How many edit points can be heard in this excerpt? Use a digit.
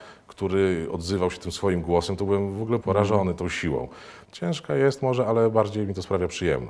2